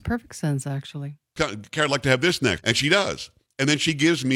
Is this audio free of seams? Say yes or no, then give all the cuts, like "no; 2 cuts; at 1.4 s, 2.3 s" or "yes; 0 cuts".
no; 2 cuts; at 1.4 s, 2.6 s